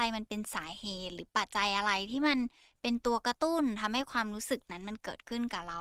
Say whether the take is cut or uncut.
cut